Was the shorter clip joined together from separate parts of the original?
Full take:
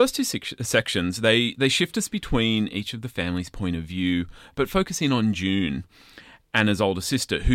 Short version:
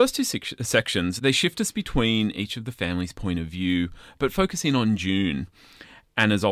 yes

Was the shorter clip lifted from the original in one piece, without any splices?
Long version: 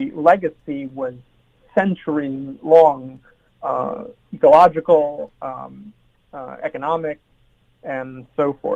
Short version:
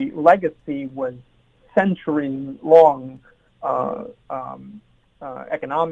no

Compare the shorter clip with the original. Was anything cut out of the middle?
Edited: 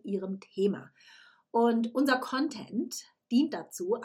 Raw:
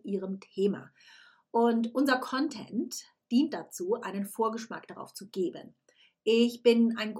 no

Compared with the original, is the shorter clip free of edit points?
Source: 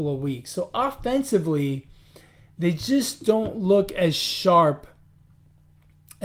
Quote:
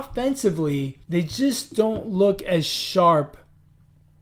no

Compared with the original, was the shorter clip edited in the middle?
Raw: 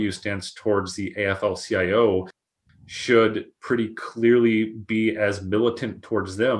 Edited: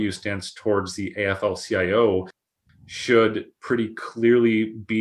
no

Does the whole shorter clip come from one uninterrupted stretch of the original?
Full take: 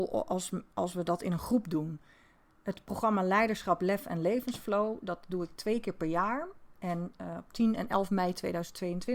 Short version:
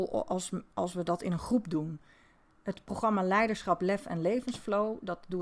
yes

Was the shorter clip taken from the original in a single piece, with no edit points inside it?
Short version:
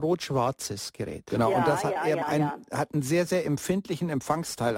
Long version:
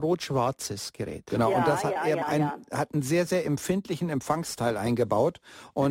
yes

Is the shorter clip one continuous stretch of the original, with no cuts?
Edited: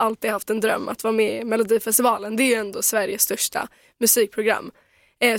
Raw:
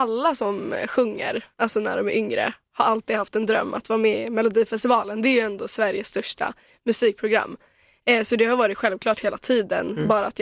yes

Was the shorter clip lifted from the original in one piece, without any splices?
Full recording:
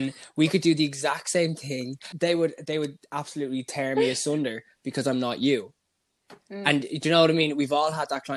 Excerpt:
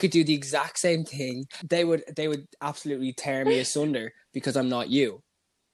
yes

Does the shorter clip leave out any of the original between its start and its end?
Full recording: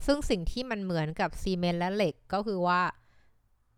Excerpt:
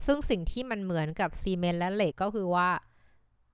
yes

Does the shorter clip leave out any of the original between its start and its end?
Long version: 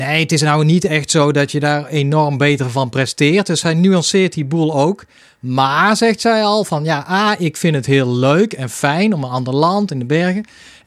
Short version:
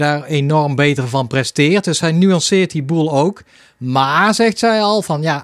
no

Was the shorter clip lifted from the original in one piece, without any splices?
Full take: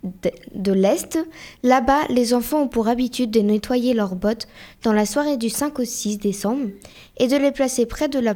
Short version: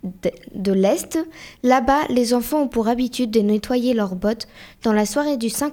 yes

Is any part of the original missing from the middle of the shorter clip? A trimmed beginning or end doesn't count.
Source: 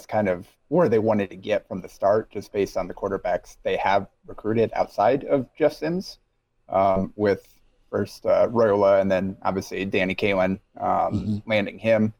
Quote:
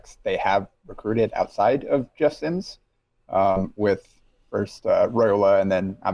no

